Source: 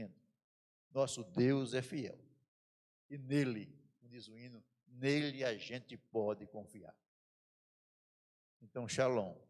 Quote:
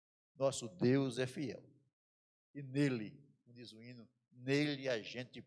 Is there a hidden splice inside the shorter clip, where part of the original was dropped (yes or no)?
no